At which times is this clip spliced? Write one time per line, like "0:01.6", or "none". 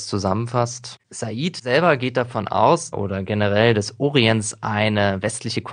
0:01.0
0:02.9